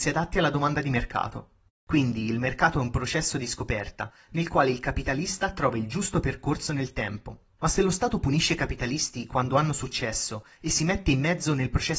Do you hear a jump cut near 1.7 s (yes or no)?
yes